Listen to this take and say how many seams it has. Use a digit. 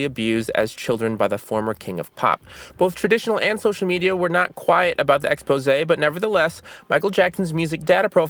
0